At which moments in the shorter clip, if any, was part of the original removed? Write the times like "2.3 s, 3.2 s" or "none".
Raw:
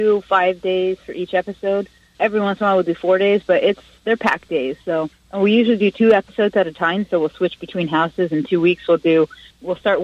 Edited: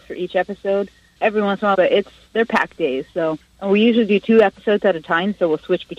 1.7 s